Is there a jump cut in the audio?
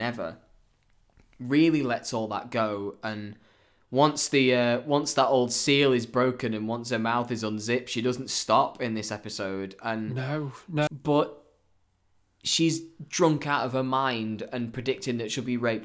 yes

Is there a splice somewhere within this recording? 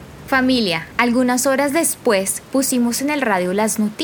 yes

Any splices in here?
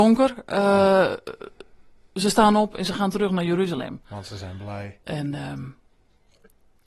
yes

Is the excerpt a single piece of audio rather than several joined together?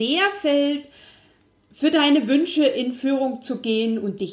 yes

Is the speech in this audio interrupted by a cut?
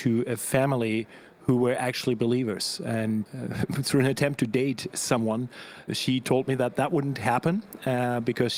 yes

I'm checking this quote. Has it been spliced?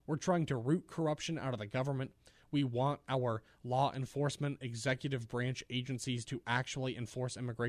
no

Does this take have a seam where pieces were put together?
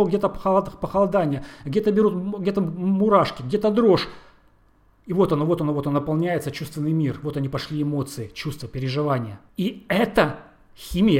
yes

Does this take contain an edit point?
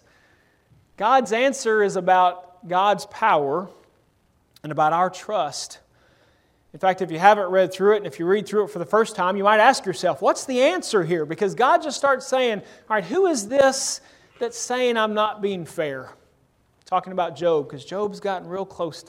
no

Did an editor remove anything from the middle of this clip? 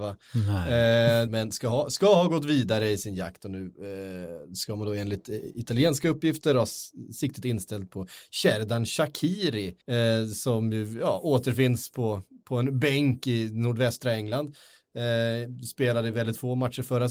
yes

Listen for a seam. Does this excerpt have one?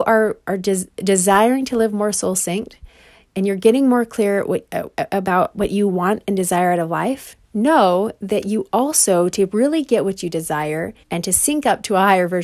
yes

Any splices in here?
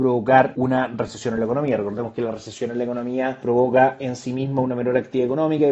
no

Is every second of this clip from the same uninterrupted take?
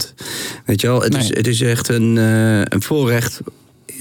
yes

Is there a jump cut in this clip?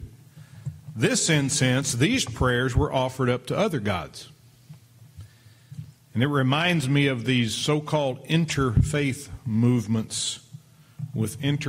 no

